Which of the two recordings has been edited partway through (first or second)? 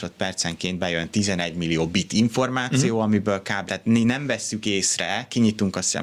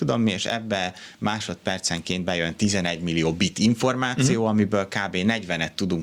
first